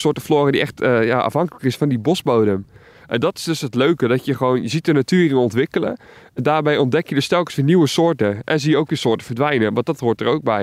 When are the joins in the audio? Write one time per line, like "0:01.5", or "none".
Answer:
none

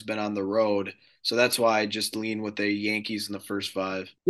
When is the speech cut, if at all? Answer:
none

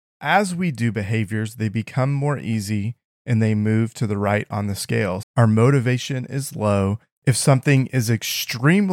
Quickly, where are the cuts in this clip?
0:05.2
0:07.1

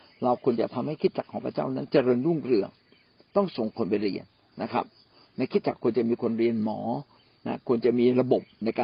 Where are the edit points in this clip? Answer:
none

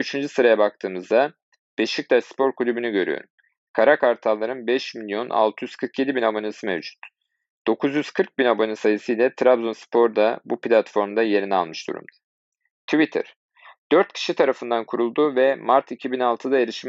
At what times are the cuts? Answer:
none

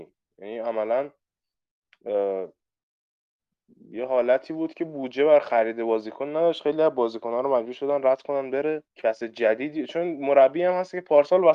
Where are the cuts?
0:08.9

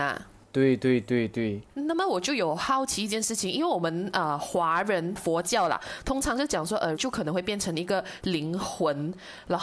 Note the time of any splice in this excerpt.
0:06.9

